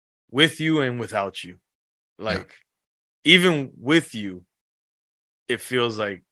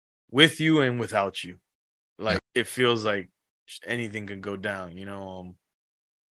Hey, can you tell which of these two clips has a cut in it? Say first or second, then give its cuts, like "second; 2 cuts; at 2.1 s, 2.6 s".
second; 1 cut; at 2.4 s